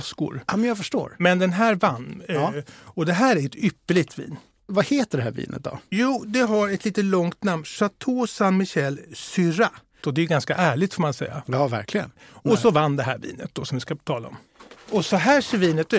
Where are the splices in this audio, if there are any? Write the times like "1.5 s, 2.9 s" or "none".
10.0 s